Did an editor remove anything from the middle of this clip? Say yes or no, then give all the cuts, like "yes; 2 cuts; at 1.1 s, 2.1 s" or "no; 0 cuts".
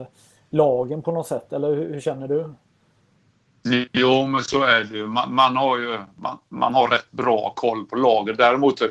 no; 0 cuts